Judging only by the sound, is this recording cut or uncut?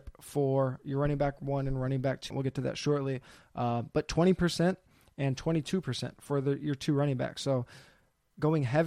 cut